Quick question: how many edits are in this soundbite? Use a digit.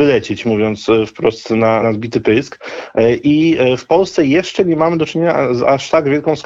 1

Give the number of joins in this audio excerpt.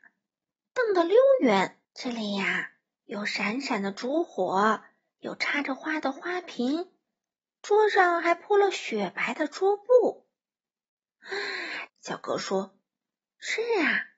2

